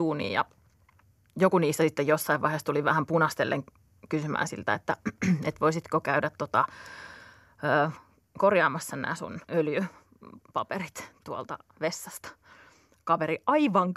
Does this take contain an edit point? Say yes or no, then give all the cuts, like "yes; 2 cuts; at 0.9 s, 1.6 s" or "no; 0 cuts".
yes; 1 cut; at 9.4 s